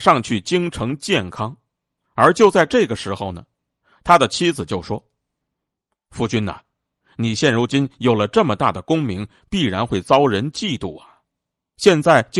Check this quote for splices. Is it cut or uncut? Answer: uncut